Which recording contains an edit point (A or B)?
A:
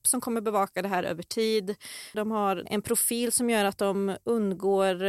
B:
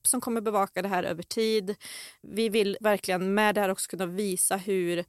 A